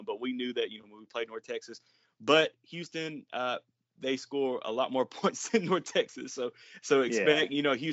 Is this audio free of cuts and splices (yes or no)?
yes